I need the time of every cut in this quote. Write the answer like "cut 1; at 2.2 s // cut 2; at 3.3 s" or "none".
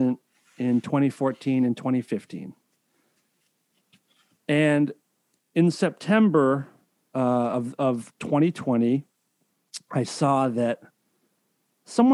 none